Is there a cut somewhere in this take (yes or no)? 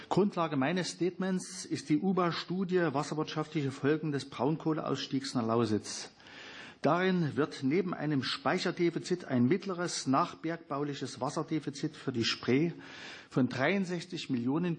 no